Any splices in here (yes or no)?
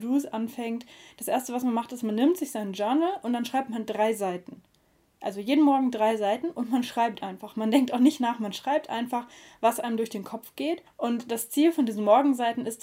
yes